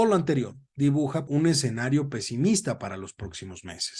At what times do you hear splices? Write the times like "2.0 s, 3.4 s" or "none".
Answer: 1.3 s